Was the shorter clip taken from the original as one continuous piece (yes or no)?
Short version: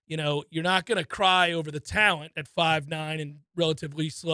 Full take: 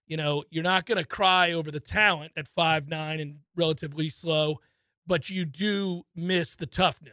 yes